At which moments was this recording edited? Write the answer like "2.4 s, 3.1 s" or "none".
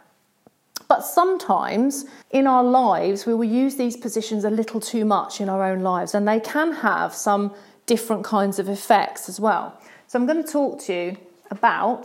2.2 s